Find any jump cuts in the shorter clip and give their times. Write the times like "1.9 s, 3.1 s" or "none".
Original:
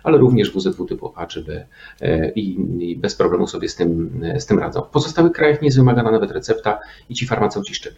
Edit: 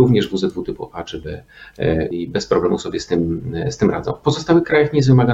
2.1 s